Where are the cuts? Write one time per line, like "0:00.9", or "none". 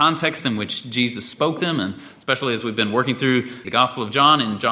0:03.6